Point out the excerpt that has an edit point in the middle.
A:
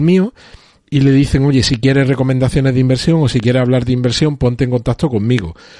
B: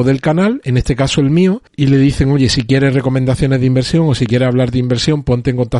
B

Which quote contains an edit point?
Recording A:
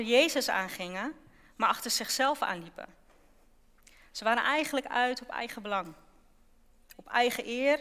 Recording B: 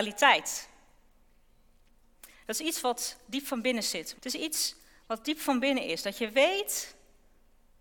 B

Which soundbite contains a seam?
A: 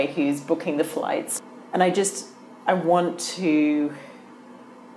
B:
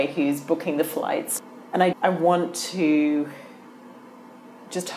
B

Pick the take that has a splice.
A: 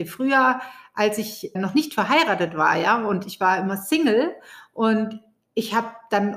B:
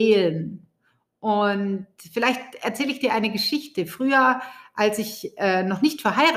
A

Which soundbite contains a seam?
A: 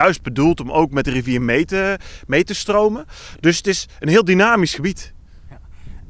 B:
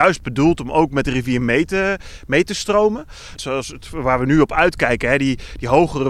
B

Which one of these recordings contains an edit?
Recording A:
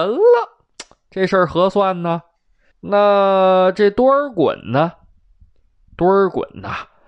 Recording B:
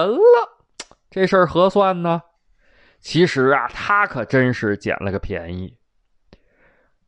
A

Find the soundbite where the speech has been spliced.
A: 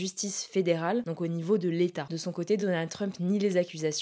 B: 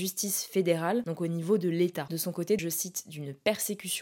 B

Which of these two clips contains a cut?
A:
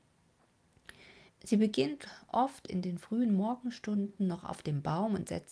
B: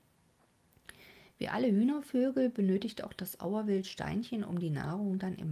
A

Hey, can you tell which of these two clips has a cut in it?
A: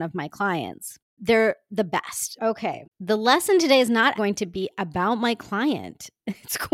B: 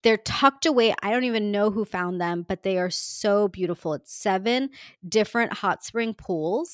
A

